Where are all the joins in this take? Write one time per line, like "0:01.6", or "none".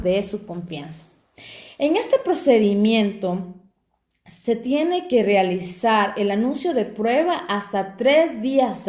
none